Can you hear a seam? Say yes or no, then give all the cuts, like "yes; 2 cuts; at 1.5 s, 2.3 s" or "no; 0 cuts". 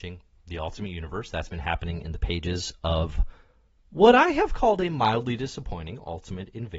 no; 0 cuts